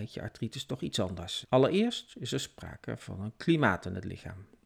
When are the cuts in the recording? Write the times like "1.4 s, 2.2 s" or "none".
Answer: 1.4 s